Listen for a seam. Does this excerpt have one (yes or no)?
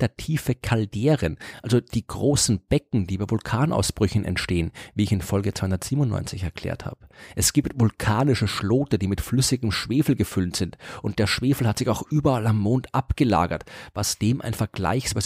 no